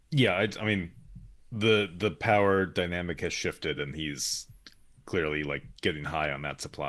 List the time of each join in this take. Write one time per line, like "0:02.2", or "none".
none